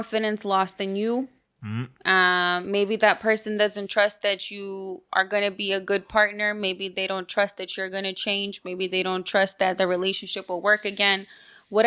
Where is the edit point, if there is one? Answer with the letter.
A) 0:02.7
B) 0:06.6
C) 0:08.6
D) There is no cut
D